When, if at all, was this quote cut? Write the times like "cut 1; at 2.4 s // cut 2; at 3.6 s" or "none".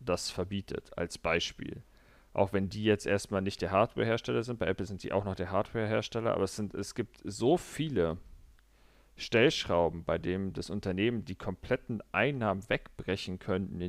none